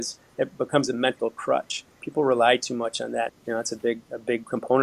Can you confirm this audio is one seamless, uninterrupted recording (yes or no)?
no